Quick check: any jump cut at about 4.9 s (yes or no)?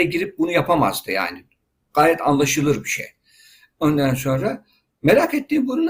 no